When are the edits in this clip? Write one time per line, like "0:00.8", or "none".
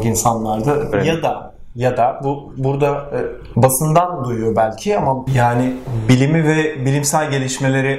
0:00.9
0:03.5